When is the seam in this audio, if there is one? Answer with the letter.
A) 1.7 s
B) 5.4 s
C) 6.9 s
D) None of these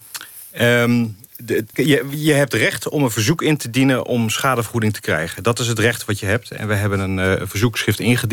A